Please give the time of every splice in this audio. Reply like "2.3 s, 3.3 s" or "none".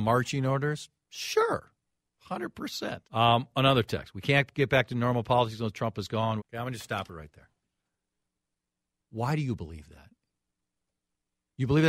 3.0 s, 6.4 s